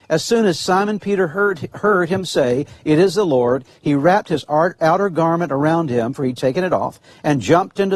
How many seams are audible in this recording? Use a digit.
0